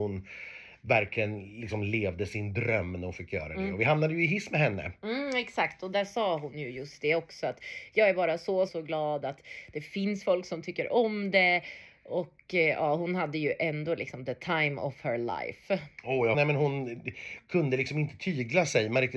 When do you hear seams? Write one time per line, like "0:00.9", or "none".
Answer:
0:08.7
0:16.3

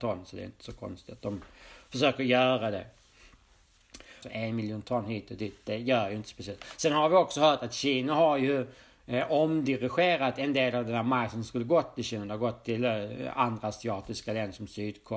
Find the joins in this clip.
0:04.2

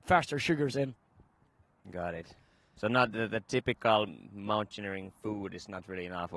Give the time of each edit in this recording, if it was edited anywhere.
none

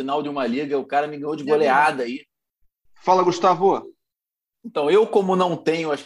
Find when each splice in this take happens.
0:02.9

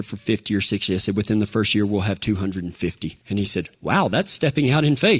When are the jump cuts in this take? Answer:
0:03.2

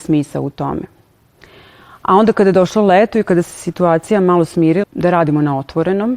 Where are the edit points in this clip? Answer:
0:04.8

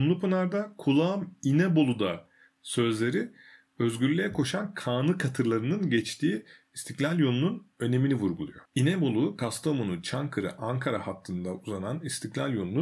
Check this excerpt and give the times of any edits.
none

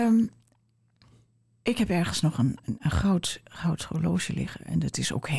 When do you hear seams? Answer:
none

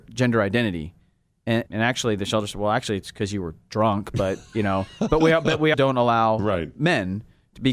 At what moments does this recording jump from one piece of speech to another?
0:01.7
0:05.7

